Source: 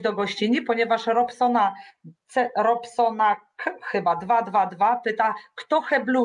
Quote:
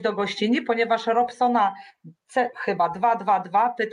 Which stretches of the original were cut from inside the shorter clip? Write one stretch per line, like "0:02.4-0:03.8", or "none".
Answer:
0:02.5-0:03.8

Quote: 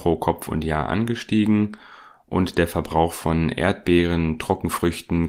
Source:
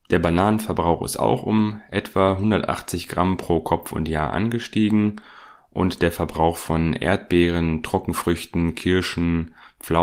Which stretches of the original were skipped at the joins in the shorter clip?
none

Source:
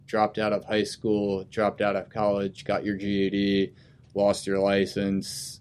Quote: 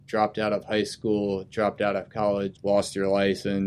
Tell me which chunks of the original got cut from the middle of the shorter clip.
0:02.6-0:04.1

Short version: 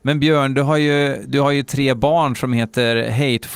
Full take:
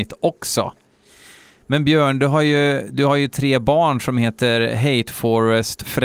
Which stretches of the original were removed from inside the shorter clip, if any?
none

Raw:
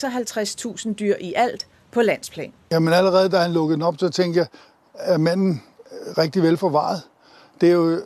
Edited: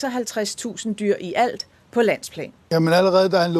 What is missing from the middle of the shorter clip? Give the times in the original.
none

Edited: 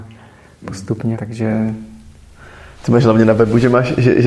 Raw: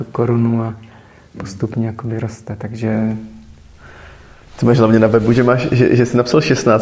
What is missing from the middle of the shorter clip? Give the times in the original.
0:01.9-0:02.6
0:04.2-0:04.5

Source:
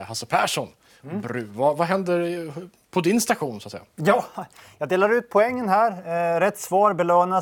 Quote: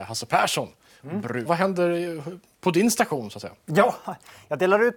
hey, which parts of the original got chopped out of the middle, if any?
0:01.5-0:01.8

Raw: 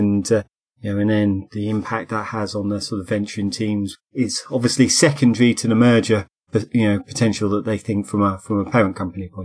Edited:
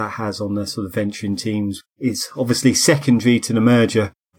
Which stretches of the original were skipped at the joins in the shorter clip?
none

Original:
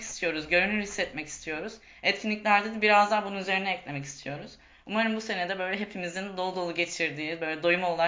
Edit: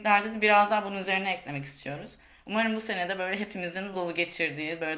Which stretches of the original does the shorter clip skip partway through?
0:06.3-0:06.5

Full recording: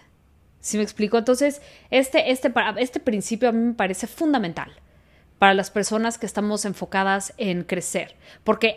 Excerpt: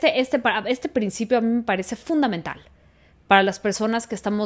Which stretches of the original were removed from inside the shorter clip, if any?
none

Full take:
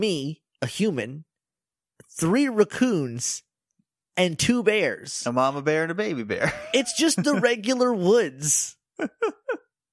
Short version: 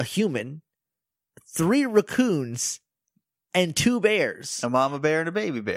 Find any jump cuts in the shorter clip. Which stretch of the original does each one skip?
none

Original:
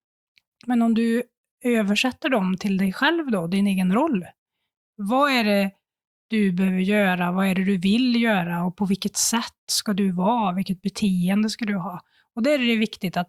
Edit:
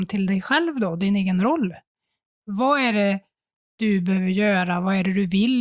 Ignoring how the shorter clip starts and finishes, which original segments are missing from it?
none

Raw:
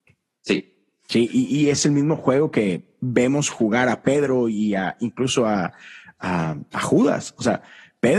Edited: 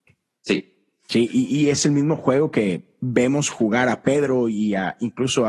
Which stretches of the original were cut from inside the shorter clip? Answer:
none

